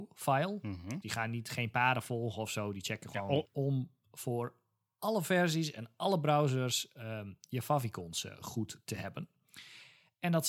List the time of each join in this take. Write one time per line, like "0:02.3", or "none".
0:01.0
0:03.4

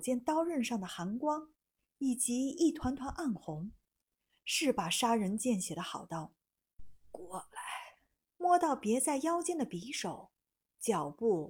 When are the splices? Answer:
0:08.3

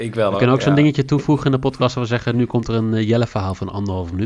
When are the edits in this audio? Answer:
none

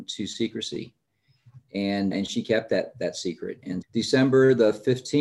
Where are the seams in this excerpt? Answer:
0:02.1
0:03.8

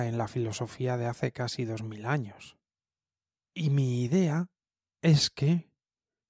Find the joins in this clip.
0:03.4

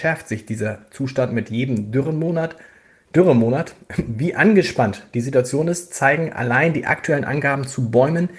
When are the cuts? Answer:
none

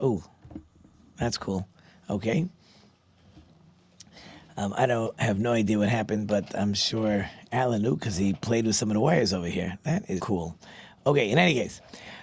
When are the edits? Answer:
0:10.2

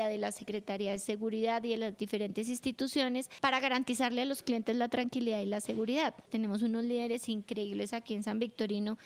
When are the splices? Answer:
0:06.3

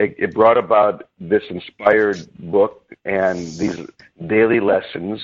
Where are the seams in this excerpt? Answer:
none

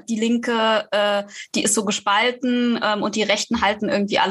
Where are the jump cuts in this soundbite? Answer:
none

